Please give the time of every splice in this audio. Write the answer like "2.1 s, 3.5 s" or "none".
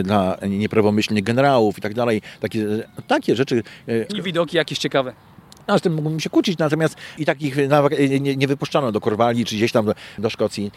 4.1 s